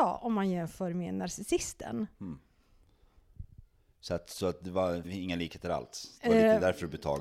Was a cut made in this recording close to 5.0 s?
yes; 1 cut; at 5.0 s

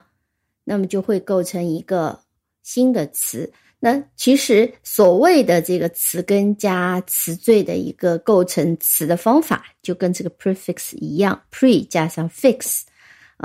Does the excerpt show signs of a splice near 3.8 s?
yes; 1 cut; at 3.8 s

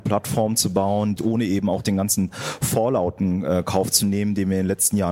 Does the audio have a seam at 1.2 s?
yes; 1 cut; at 1.2 s

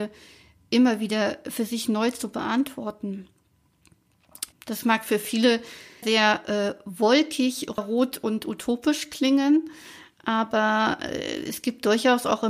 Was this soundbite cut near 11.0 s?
no; 3 cuts; at 4.5 s, 6.0 s, 7.8 s

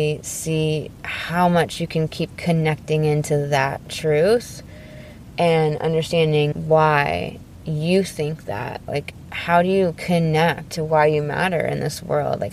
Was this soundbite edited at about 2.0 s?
no; 2 cuts; at 6.5 s, 8.9 s

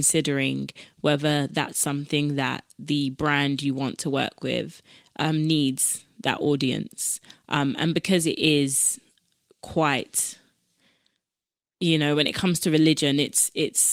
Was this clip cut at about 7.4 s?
no; 0 cuts

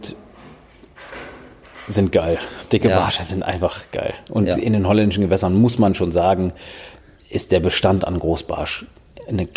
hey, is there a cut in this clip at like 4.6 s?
no; 0 cuts

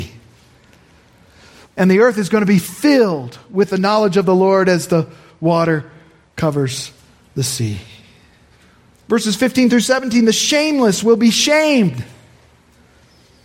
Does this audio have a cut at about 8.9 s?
yes; 2 cuts; at 1.6 s, 8.9 s

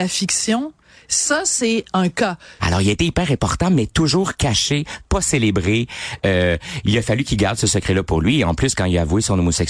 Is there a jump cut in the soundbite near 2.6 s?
yes; 1 cut; at 2.6 s

